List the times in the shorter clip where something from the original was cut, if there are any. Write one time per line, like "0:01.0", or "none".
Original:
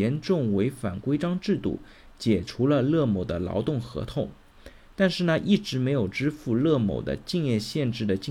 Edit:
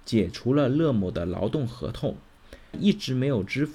0:02.7